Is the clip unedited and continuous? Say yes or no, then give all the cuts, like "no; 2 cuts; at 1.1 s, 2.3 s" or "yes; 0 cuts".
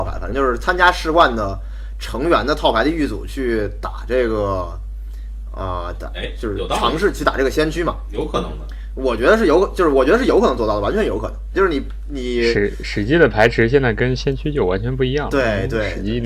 no; 1 cut; at 11.5 s